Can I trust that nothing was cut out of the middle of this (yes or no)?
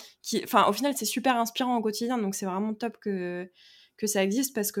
yes